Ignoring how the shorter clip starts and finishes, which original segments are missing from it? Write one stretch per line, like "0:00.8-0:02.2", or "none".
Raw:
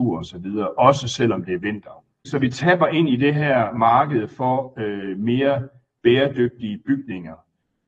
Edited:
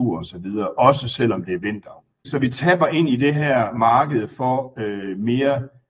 none